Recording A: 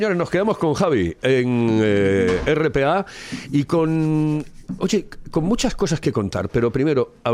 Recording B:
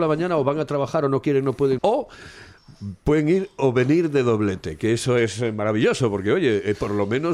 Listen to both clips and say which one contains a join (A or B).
B